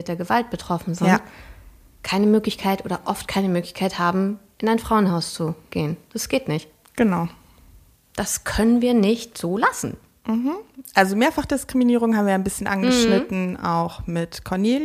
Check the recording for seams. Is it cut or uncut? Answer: uncut